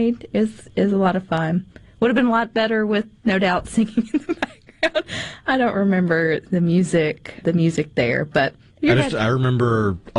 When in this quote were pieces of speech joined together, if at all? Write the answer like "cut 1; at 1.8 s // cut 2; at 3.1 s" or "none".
cut 1; at 7.4 s